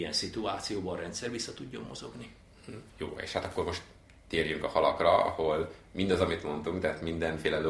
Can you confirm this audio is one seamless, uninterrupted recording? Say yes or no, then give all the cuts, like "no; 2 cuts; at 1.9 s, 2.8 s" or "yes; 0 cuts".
no; 1 cut; at 2.9 s